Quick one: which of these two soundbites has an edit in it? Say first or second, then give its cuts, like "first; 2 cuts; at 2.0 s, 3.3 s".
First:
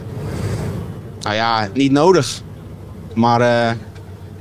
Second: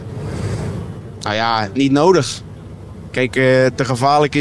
first; 1 cut; at 3.1 s